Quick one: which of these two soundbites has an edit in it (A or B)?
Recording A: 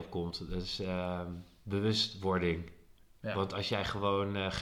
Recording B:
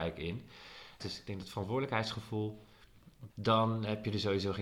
B